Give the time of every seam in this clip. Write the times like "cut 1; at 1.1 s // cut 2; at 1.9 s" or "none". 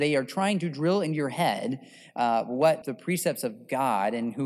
cut 1; at 2.8 s